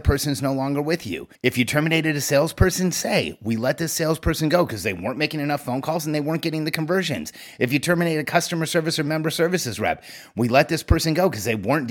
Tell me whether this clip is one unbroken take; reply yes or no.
no